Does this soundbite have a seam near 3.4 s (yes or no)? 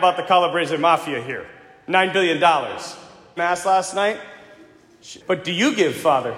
yes